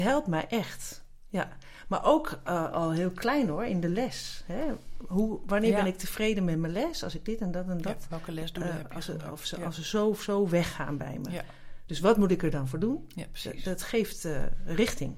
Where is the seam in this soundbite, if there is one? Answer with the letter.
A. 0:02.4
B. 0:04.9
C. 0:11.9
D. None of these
D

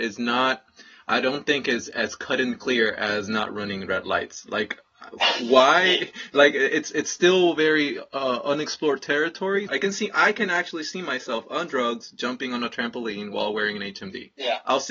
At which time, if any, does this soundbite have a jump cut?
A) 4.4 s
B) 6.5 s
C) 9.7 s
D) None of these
C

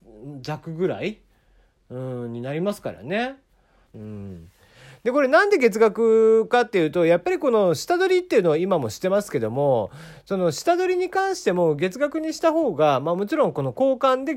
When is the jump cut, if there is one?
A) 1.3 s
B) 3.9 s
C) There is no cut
B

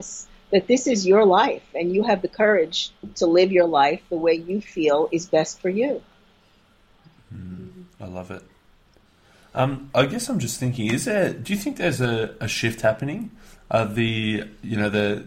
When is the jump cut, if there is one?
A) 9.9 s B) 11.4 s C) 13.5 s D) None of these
A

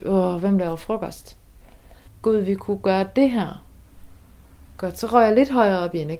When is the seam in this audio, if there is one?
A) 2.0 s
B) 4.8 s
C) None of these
A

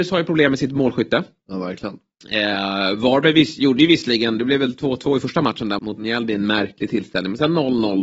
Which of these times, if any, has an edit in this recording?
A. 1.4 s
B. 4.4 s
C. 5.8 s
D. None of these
C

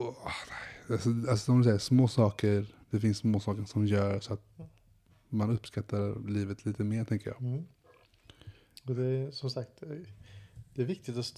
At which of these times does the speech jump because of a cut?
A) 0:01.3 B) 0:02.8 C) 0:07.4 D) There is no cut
B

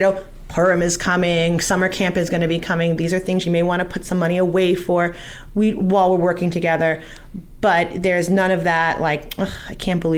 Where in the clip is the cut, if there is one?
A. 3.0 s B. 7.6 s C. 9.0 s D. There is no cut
D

